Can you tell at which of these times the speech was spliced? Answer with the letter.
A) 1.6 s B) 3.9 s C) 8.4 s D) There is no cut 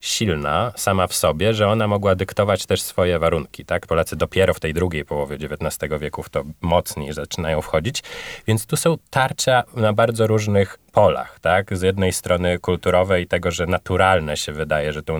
B